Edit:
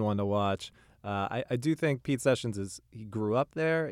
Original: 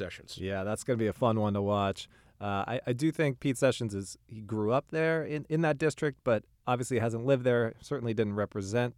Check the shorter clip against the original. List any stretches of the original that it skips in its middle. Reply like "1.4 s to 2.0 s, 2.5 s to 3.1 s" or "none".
none